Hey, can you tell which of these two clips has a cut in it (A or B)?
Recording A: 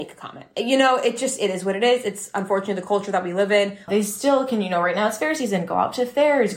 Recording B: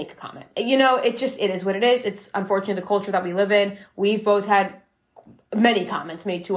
A